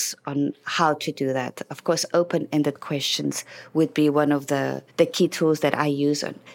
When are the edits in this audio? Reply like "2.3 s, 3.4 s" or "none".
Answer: 4.9 s